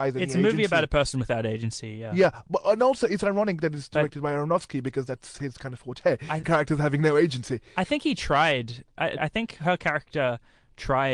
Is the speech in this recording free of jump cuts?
no; 2 cuts; at 6.4 s, 9.2 s

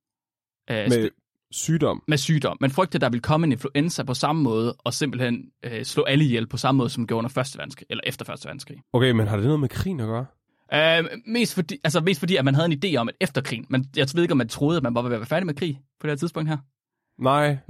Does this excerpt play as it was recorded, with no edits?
no; 1 cut; at 8.8 s

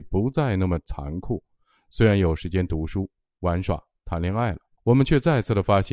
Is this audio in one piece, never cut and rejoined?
no; 1 cut; at 4.8 s

